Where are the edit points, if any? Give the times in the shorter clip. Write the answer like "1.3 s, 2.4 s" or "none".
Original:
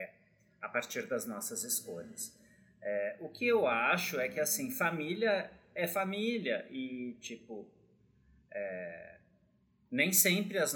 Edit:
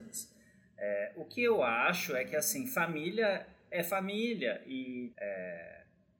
5.1 s